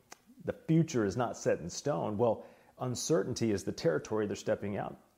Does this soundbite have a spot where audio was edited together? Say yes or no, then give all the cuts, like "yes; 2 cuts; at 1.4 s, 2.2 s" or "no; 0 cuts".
no; 0 cuts